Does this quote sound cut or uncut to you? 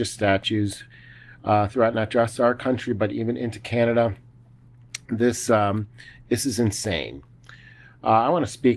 uncut